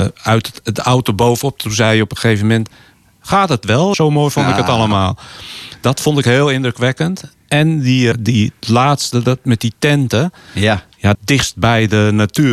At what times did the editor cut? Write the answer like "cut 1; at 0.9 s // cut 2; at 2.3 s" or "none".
cut 1; at 3.9 s // cut 2; at 8.1 s // cut 3; at 11.1 s